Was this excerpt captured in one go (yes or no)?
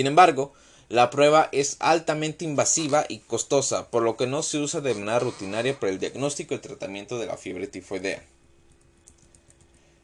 yes